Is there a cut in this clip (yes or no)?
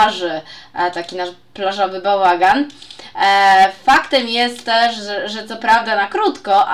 no